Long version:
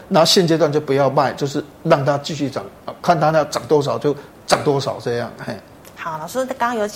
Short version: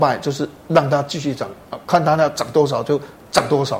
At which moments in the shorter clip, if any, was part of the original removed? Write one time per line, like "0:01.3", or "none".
none